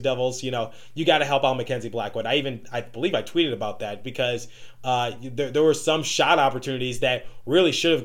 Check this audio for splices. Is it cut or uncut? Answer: uncut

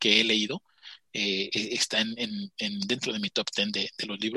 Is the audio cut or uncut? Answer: uncut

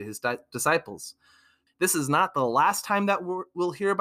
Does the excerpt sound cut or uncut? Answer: cut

